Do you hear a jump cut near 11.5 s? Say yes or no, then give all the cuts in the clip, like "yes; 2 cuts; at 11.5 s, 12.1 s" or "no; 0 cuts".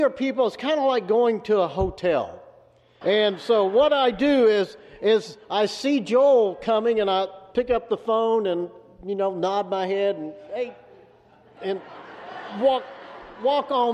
no; 1 cut; at 3.0 s